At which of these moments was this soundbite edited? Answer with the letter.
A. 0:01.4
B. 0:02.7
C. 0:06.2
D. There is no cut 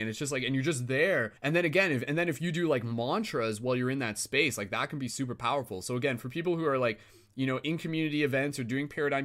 A